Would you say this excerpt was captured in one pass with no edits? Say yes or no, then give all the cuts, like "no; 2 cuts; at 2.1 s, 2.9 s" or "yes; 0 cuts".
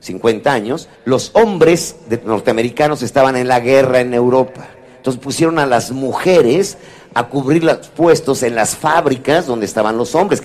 no; 1 cut; at 0.9 s